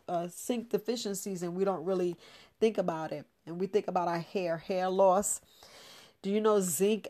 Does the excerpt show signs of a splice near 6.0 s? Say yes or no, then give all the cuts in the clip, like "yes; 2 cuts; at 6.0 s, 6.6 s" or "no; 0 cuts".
no; 0 cuts